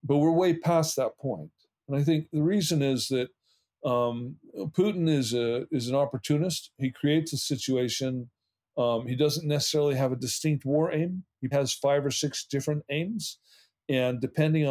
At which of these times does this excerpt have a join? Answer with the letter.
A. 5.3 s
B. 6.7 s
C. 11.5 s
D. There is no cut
C